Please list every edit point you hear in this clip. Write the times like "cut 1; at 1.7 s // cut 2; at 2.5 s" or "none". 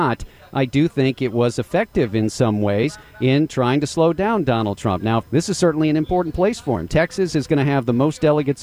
cut 1; at 5.2 s